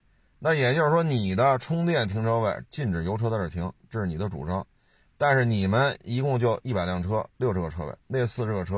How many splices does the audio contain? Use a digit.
0